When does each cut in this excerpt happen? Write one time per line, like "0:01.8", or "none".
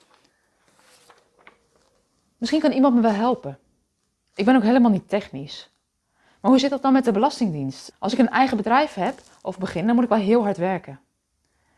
0:07.9